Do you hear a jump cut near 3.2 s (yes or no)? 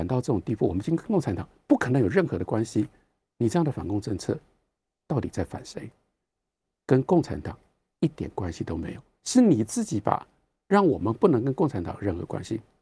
no